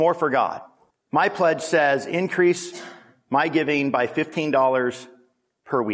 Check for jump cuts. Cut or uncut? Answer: cut